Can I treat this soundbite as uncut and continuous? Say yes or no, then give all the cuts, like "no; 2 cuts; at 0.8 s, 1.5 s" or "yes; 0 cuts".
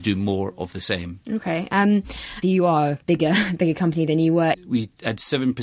no; 2 cuts; at 2.4 s, 4.5 s